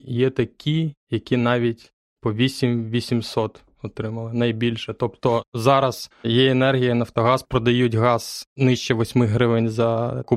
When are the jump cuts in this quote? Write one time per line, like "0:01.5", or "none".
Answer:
0:06.1